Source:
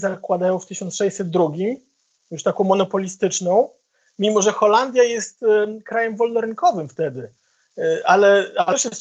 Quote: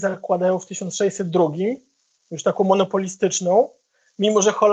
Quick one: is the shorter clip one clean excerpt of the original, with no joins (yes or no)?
yes